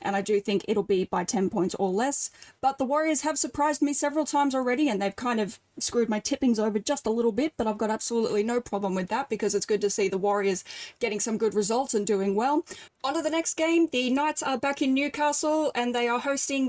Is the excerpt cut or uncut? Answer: cut